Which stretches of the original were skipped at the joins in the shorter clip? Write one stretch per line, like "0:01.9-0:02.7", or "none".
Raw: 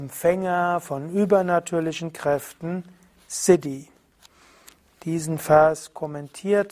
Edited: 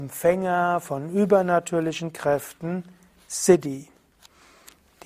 none